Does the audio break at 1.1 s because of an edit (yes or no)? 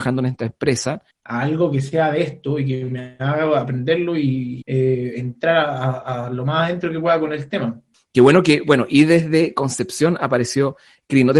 yes